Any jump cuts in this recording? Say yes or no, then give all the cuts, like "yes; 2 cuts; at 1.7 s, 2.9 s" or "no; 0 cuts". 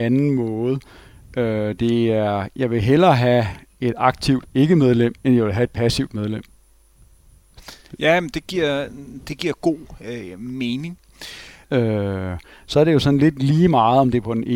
yes; 1 cut; at 11.6 s